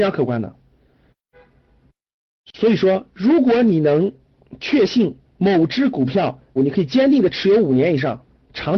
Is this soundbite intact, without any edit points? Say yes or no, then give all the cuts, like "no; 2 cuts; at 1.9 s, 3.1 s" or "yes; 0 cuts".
no; 2 cuts; at 5.3 s, 6.6 s